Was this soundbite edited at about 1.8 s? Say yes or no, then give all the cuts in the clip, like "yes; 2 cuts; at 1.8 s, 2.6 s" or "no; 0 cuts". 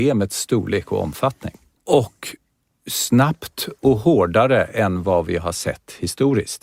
yes; 1 cut; at 1.8 s